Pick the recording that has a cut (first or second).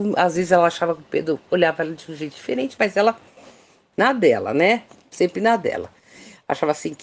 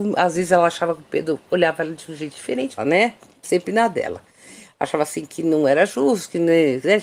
second